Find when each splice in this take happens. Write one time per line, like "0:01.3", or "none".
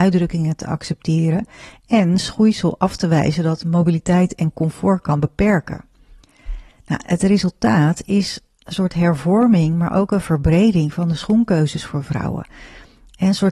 none